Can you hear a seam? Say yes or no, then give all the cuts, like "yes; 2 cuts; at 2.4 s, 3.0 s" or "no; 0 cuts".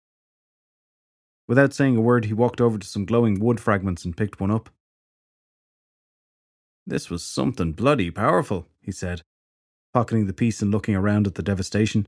no; 0 cuts